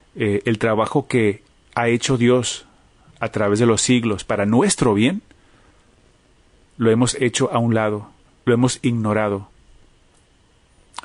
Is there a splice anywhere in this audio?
no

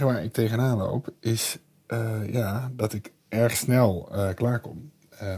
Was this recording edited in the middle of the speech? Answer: yes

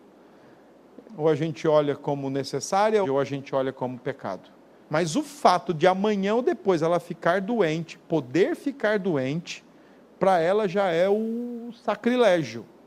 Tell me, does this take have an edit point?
yes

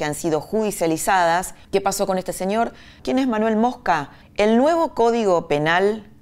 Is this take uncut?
no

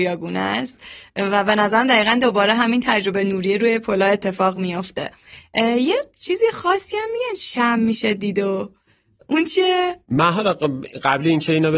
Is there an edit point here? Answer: yes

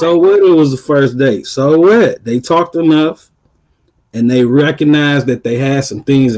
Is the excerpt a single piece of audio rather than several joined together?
yes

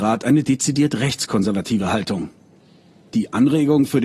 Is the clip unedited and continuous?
yes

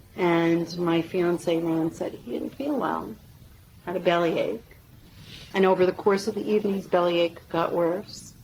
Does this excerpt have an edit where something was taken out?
no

